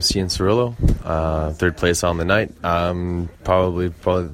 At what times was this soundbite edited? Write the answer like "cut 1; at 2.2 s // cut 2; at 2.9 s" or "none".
none